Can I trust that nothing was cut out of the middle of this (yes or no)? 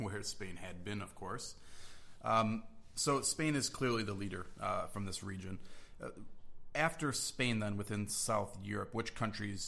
yes